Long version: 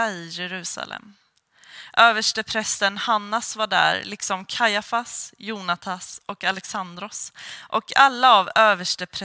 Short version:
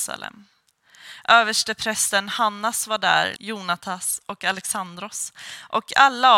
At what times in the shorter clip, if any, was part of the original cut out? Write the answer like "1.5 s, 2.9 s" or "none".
3.4 s